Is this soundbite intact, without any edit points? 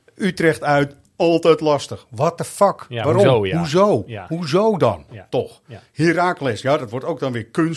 yes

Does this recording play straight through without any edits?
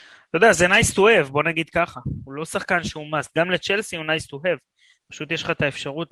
yes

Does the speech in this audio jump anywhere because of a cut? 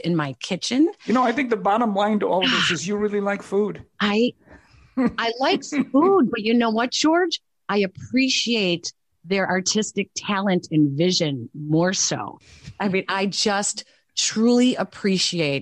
yes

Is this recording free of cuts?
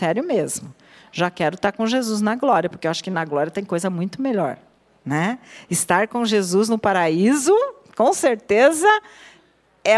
yes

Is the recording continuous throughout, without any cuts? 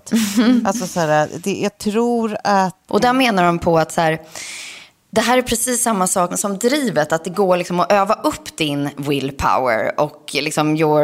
no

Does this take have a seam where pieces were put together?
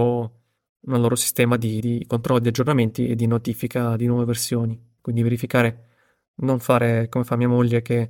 no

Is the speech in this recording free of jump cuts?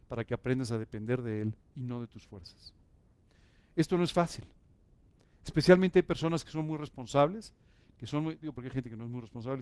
yes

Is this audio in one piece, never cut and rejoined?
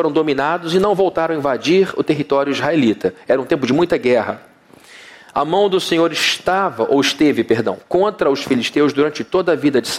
yes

